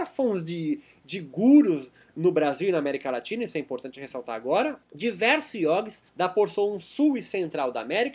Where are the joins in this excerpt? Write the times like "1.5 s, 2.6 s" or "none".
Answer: 4.8 s, 6.1 s